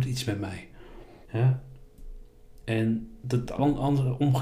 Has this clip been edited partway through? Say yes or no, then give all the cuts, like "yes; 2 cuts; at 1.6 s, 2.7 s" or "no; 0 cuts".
yes; 1 cut; at 1.2 s